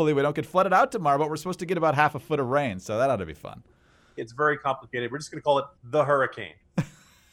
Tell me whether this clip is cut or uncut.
cut